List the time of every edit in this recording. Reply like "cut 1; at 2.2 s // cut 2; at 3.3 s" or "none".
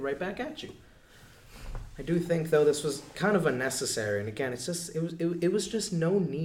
none